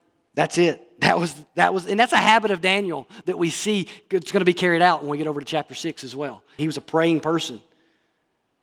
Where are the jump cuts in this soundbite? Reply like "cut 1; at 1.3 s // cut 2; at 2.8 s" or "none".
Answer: cut 1; at 6.6 s